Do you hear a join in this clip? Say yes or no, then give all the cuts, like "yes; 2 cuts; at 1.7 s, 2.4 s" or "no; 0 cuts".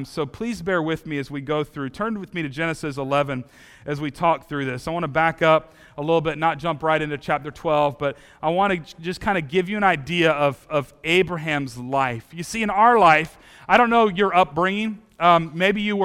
no; 0 cuts